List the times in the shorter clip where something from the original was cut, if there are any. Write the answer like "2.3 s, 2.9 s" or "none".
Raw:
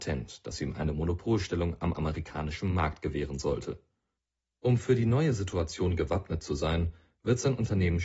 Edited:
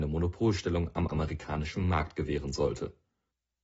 none